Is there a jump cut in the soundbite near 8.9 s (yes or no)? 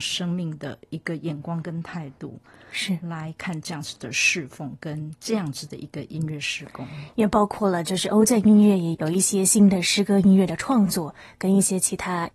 yes